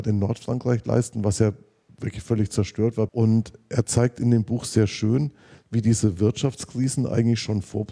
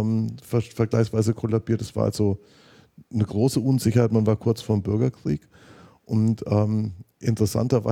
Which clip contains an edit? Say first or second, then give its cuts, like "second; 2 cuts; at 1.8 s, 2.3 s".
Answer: first; 1 cut; at 3.1 s